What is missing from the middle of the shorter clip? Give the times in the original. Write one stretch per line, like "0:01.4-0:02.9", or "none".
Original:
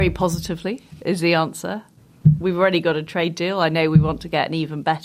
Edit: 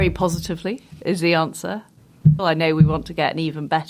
0:02.4-0:03.5